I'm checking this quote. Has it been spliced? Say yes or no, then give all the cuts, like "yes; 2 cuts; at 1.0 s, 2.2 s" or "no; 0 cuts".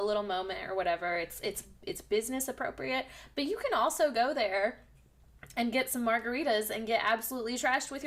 no; 0 cuts